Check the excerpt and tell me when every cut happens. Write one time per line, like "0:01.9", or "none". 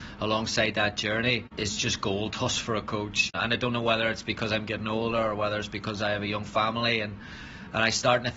none